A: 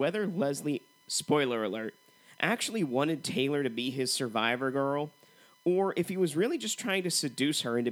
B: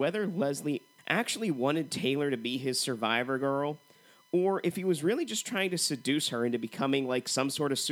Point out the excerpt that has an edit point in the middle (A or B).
B